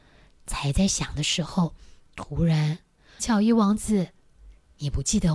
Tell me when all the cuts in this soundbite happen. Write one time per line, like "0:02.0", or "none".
0:03.2